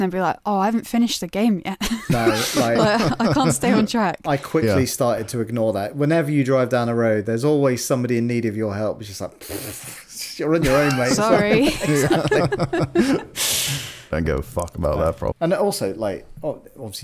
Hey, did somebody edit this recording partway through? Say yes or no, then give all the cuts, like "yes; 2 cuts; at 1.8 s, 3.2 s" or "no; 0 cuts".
yes; 1 cut; at 15.3 s